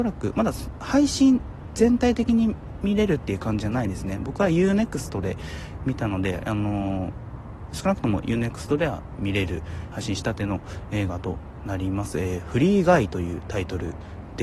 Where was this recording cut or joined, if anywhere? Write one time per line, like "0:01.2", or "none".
0:09.9